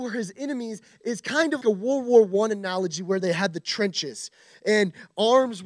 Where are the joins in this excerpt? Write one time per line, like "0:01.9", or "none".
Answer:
0:01.6